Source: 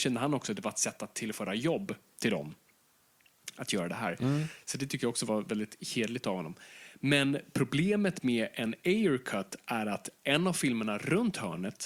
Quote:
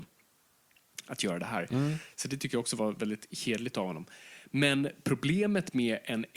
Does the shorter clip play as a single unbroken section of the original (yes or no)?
yes